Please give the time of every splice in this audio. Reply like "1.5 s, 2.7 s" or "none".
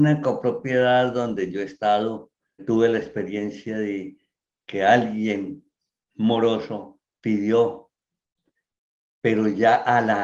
2.6 s

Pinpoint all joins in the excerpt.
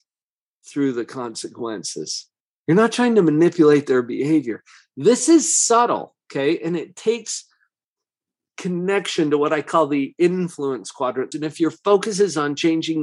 11.3 s

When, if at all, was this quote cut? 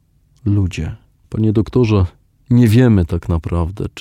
1.2 s

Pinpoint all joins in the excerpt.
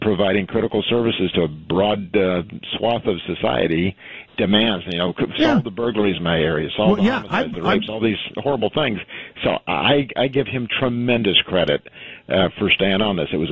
4.3 s

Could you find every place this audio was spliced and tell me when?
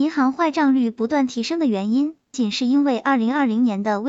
2.3 s

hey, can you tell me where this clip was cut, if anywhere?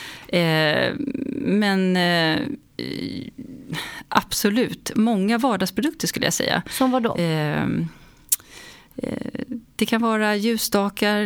none

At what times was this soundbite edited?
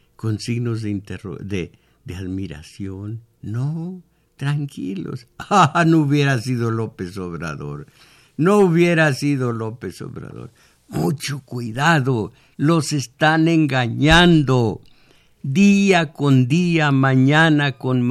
none

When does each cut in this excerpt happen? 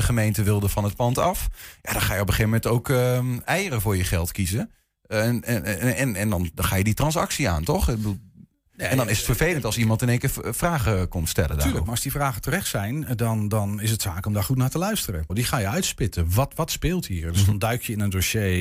15.3 s

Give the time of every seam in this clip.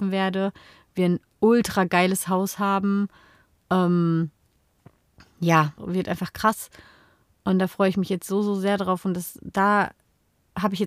5.8 s

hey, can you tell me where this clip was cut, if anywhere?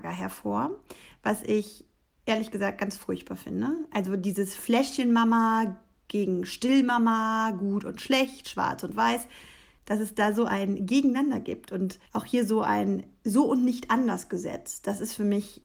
12.1 s

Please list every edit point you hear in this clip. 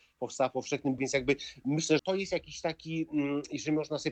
1.0 s, 2.0 s

